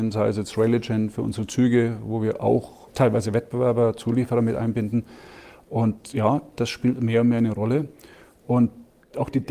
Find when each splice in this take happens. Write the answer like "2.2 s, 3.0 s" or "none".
2.9 s